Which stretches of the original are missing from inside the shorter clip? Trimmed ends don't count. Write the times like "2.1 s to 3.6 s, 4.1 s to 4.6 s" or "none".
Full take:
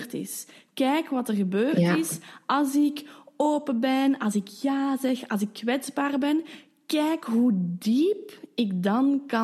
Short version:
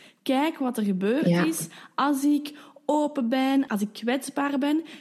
4.2 s to 5.3 s